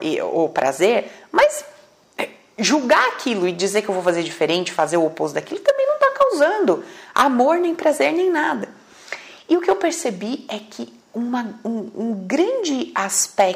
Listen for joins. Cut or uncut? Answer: uncut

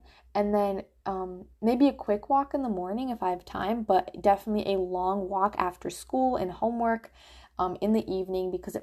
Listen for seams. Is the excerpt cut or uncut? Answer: uncut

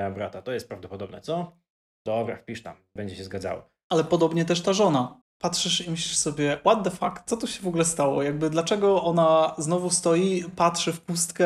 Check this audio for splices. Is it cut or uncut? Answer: cut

